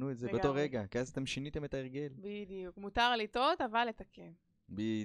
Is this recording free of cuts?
yes; 0 cuts

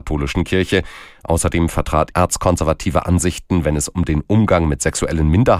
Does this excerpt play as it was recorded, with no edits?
no; 1 cut; at 2.1 s

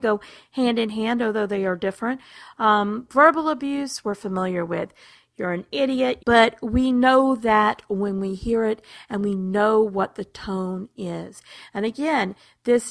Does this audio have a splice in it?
yes; 1 cut; at 6.2 s

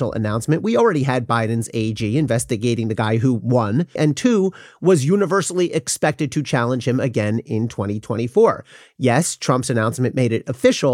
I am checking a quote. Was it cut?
yes; 1 cut; at 4.0 s

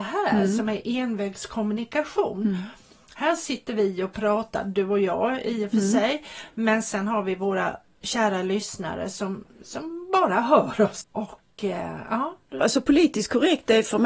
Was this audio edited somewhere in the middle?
yes; 2 cuts; at 11.0 s, 12.6 s

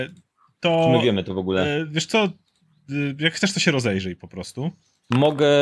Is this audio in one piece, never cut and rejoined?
yes; 0 cuts

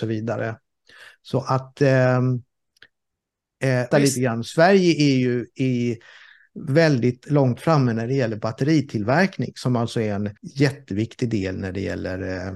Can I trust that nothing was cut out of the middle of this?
no; 2 cuts; at 3.9 s, 10.4 s

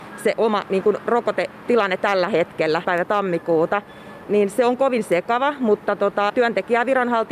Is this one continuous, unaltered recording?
no; 3 cuts; at 2.8 s, 4.2 s, 6.3 s

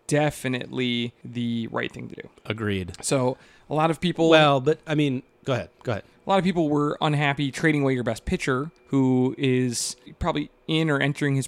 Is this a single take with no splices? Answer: yes; 0 cuts

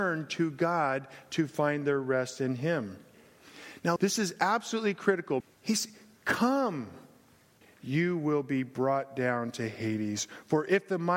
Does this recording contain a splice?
yes; 3 cuts; at 4.0 s, 5.4 s, 7.6 s

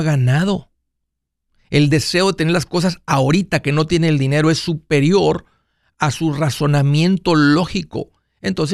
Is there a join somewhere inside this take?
no; 0 cuts

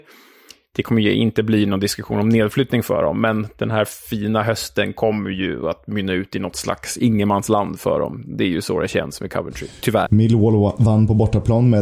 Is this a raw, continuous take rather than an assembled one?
no; 1 cut; at 10.1 s

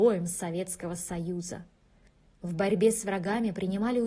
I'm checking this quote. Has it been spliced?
yes; 1 cut; at 2.3 s

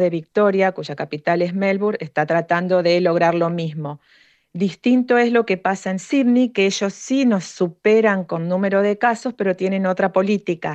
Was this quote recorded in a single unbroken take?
yes; 0 cuts

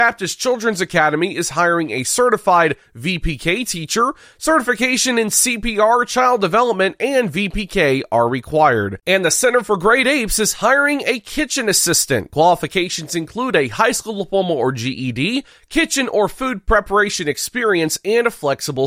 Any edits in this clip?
no; 0 cuts

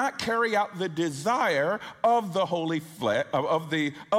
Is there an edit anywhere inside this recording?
no; 0 cuts

